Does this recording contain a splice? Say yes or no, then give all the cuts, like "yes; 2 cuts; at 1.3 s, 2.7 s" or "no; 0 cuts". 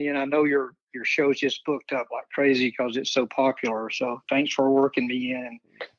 no; 0 cuts